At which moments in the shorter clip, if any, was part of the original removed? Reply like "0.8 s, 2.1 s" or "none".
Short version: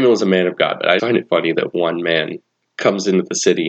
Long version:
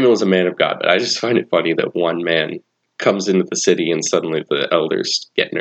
1.0 s